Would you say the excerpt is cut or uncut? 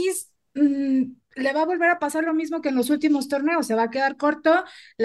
uncut